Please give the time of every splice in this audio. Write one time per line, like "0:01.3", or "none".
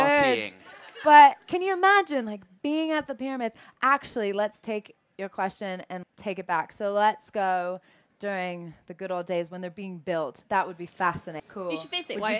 0:06.0
0:11.4